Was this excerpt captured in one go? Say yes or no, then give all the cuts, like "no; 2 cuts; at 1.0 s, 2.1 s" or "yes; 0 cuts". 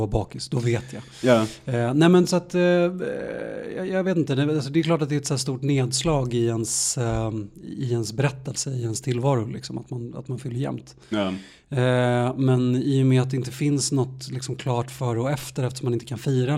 yes; 0 cuts